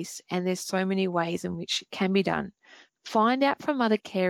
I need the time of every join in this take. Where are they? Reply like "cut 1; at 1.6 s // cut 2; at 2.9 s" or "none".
cut 1; at 2.9 s